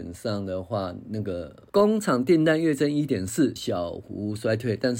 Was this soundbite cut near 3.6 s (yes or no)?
yes